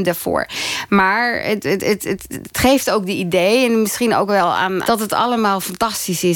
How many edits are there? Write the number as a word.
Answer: one